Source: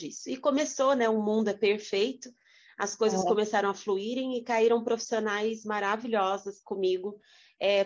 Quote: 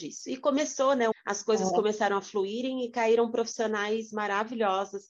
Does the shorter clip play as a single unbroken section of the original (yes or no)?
no